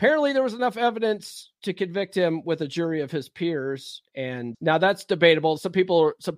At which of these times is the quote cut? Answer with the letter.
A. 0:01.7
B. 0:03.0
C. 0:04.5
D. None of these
C